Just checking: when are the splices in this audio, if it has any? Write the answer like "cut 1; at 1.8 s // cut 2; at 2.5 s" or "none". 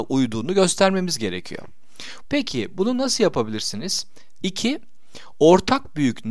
cut 1; at 2.2 s // cut 2; at 4.4 s